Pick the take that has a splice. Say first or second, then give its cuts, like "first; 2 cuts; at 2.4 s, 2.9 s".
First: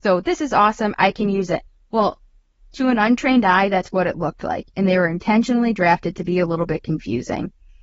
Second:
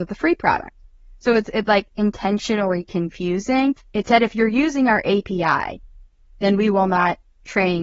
second; 2 cuts; at 1.9 s, 3.8 s